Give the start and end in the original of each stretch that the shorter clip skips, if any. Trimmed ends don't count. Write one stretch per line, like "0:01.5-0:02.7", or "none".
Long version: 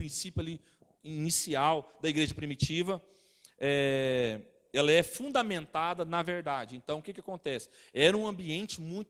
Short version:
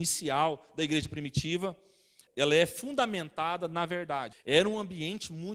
0:03.5-0:04.6
0:06.7-0:07.8

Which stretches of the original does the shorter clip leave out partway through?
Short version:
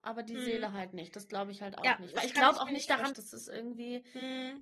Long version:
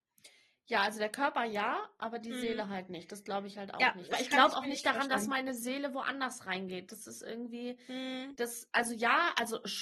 0:05.1-0:06.9

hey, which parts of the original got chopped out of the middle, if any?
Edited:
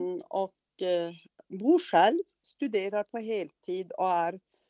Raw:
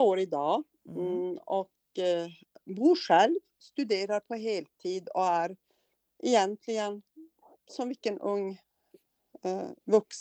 none

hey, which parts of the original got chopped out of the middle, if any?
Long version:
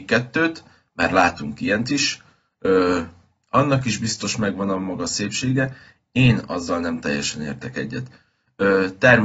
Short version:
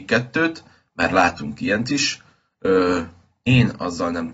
0:03.4-0:06.1

